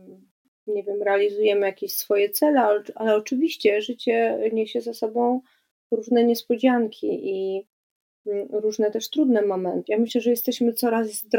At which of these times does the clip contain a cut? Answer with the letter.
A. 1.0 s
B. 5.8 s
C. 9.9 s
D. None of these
C